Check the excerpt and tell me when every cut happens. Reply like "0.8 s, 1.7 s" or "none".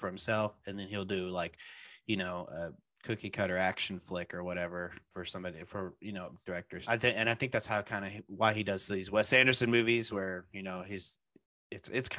none